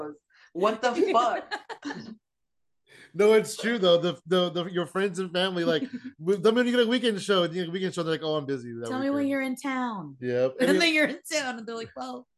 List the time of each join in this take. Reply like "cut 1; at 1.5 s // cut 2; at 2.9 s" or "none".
none